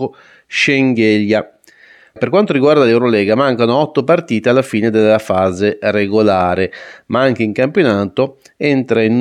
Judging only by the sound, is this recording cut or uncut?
cut